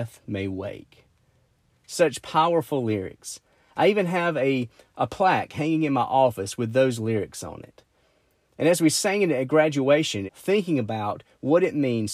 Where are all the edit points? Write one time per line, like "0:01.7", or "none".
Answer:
0:10.3